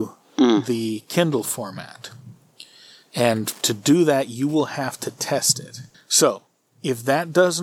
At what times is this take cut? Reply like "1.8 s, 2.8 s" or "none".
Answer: none

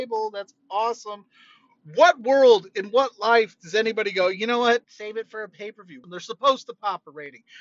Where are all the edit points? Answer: 4.8 s, 6.0 s

